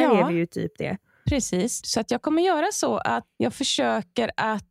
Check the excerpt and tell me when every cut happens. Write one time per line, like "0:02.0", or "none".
0:01.8